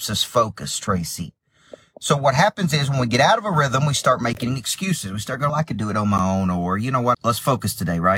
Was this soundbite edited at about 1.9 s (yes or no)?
no